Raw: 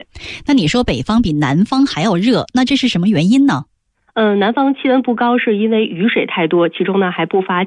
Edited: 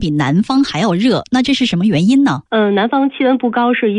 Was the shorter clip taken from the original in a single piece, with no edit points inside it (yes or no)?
no